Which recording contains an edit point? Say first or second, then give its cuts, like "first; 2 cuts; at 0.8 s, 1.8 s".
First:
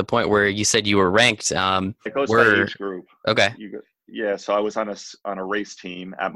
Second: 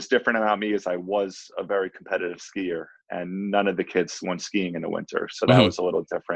first; 1 cut; at 2.1 s